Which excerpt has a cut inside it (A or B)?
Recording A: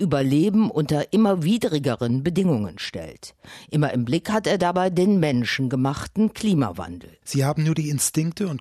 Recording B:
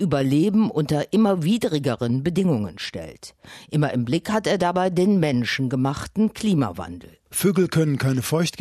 A